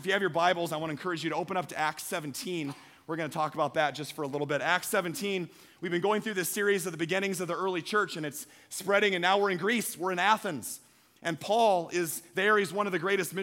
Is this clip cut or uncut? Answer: uncut